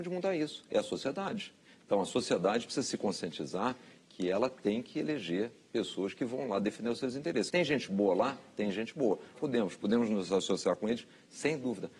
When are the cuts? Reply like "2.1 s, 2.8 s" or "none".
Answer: 7.5 s, 9.3 s

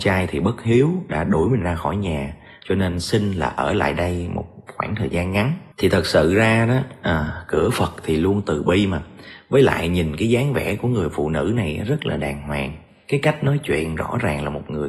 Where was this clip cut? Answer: 2.6 s, 5.7 s

